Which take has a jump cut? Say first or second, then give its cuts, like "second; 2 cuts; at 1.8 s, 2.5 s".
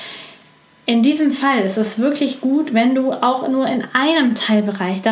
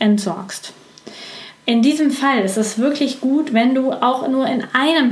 second; 1 cut; at 1.6 s